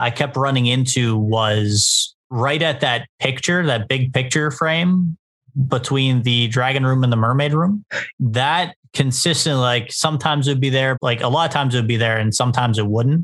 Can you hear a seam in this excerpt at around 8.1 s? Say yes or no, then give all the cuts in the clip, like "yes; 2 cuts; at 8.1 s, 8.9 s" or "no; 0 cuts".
yes; 2 cuts; at 8.1 s, 10.9 s